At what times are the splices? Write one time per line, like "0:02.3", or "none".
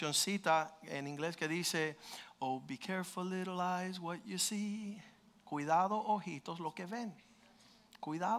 none